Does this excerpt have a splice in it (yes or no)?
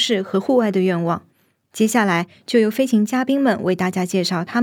no